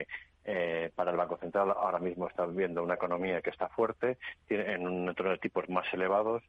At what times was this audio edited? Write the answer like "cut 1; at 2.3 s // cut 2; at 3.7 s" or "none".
none